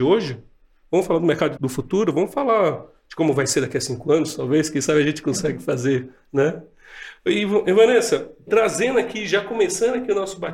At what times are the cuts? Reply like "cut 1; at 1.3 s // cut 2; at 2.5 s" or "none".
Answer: cut 1; at 1.6 s